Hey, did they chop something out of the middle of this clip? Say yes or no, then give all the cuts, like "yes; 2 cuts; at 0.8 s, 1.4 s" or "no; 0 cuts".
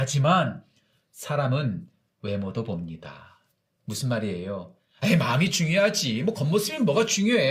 no; 0 cuts